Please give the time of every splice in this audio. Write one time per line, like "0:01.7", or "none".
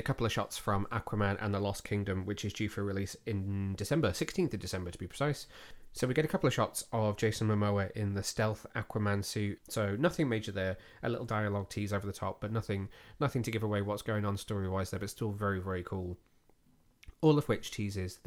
0:09.6